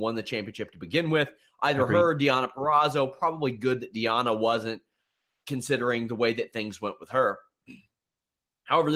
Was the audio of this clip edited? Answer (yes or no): no